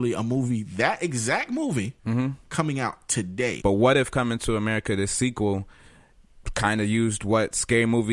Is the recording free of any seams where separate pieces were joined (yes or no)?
no